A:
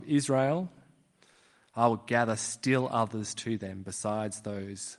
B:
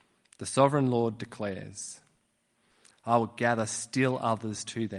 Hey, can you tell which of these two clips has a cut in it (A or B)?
B